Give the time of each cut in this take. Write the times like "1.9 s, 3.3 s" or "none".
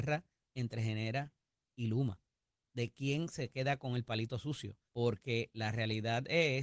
4.9 s